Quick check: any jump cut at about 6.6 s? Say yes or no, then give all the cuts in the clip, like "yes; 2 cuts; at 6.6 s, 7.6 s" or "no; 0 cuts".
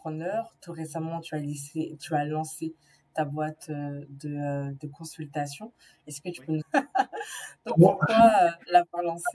yes; 1 cut; at 6.6 s